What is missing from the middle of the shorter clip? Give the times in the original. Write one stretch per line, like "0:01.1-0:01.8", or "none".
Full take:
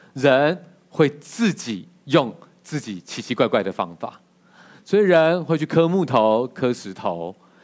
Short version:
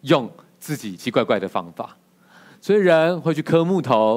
0:03.0-0:03.2